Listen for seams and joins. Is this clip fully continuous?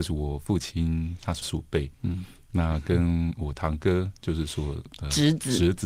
no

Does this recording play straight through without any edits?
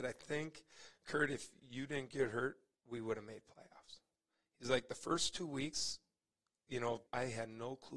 no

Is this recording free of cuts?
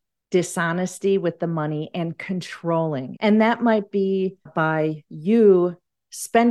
no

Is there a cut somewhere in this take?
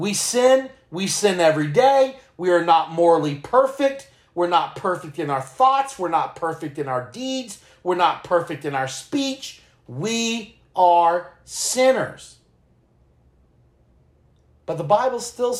no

